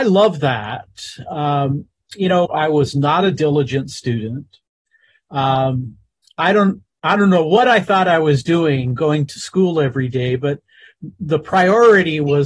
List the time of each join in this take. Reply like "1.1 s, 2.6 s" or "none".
2.5 s